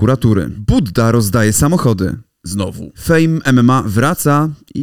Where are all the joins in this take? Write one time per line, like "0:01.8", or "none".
none